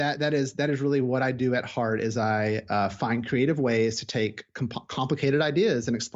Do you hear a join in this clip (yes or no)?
no